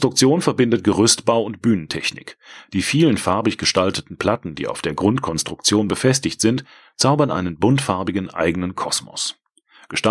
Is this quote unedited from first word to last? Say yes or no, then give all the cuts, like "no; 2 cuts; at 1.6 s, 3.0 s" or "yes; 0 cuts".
yes; 0 cuts